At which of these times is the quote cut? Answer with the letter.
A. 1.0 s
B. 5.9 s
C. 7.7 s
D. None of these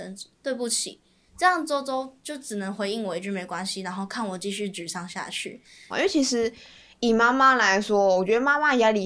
B